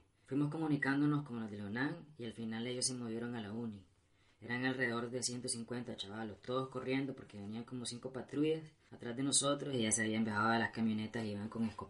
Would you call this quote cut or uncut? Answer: uncut